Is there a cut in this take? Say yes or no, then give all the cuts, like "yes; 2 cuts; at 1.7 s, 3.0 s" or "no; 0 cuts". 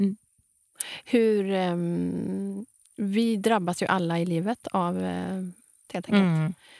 yes; 1 cut; at 5.9 s